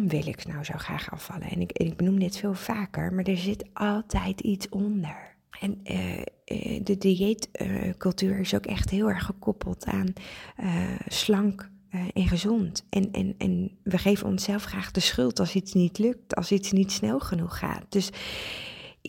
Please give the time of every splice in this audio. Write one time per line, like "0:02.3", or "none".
0:05.5

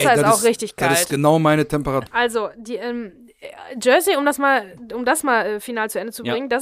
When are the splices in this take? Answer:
0:02.1

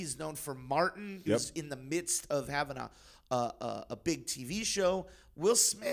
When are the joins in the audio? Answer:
0:01.3

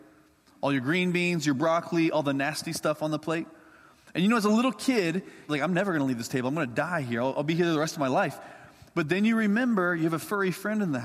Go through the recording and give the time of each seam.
0:05.5

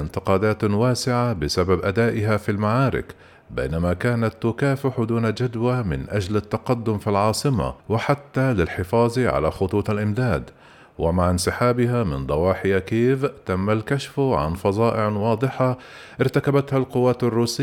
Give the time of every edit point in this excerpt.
0:07.8

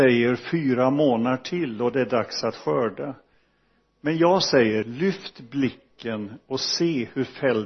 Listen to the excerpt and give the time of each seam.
0:04.8

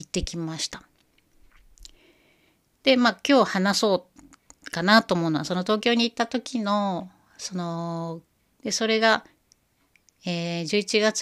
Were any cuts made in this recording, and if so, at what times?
0:08.6

